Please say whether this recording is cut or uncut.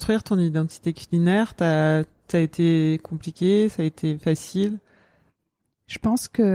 uncut